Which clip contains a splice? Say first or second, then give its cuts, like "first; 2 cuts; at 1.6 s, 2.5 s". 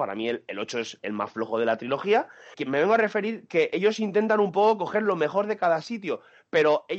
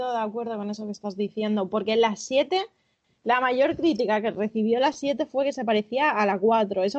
first; 1 cut; at 2.5 s